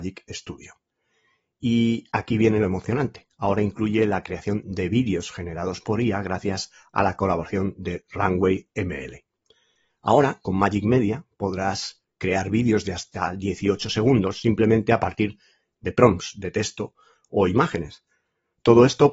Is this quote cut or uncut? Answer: uncut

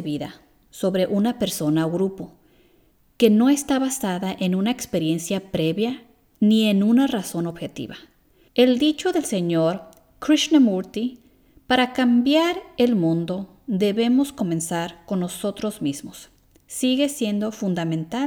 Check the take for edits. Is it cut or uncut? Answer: cut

